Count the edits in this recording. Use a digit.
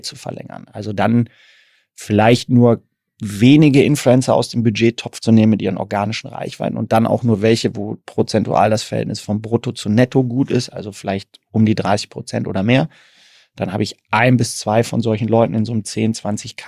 0